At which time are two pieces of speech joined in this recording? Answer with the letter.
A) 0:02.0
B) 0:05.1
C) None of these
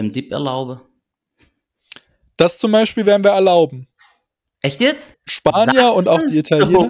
B